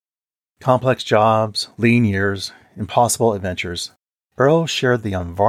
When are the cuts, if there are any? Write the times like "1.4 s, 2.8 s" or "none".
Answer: none